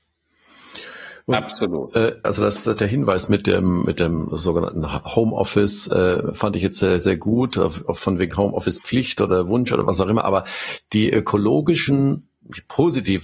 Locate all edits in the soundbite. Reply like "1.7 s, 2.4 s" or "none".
2.2 s

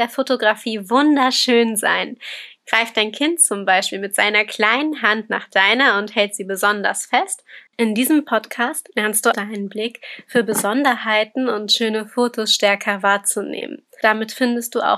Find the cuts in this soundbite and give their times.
7.7 s, 9.3 s

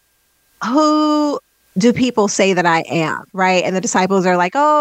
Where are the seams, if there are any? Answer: 3.3 s

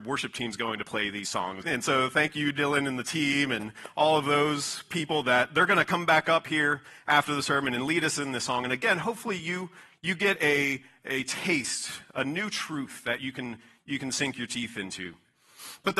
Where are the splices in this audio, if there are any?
1.6 s

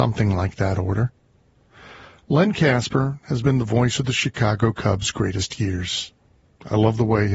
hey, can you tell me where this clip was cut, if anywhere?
2.2 s

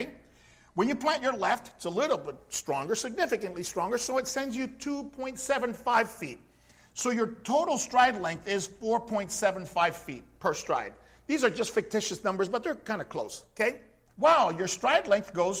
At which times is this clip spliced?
14.1 s

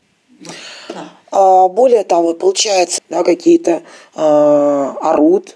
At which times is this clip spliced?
3.0 s

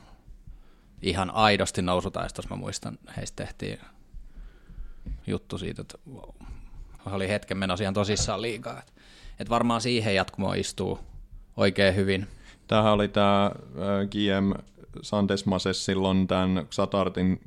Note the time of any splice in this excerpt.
5.2 s, 7.0 s

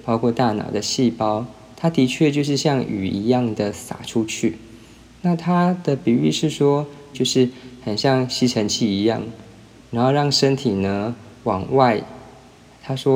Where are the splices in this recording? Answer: 7.1 s, 9.8 s

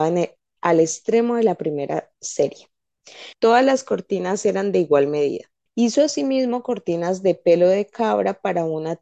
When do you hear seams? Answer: 3.3 s, 5.7 s

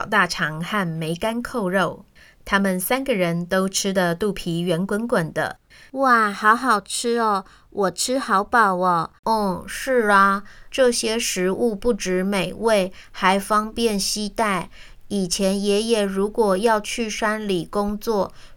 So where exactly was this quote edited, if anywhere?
9.2 s, 10.7 s

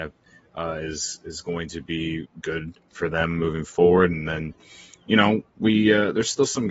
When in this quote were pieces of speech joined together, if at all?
none

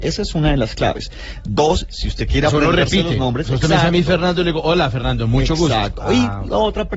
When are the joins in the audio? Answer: none

